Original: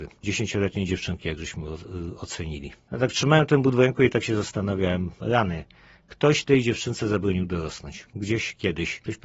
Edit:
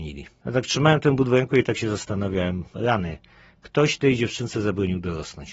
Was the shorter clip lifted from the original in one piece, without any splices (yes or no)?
yes